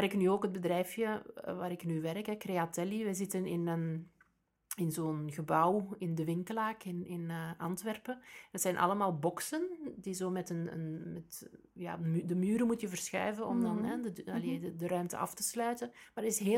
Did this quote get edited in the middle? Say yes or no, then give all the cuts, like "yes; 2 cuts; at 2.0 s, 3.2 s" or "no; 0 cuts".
no; 0 cuts